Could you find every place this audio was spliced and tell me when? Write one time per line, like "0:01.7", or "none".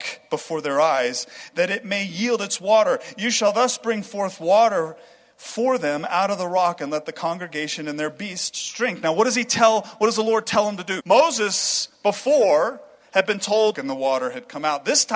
0:11.0
0:13.7